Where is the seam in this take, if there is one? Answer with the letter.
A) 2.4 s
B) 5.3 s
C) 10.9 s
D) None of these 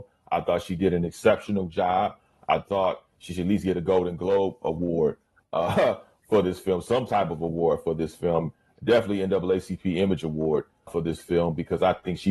C